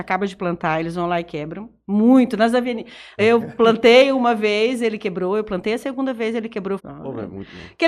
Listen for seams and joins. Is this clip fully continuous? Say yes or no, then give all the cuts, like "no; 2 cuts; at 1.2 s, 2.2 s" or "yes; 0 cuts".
no; 2 cuts; at 3.2 s, 6.8 s